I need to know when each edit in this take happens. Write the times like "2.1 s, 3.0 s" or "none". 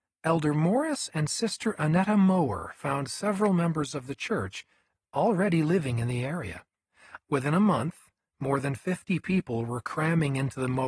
4.9 s, 7.2 s